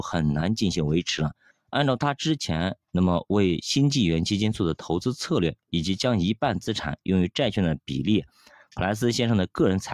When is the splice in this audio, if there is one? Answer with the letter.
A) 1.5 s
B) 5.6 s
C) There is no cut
A